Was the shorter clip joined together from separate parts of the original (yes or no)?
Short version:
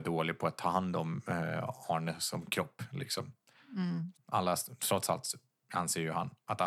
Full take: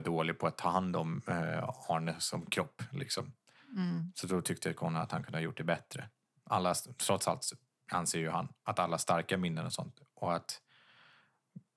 yes